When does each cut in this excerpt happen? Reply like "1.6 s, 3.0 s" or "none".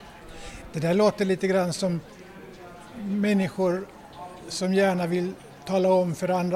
none